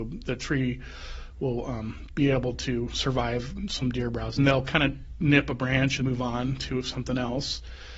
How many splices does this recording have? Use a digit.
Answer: 2